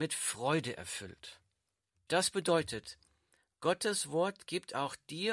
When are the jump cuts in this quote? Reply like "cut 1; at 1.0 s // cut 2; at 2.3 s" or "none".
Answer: cut 1; at 2.1 s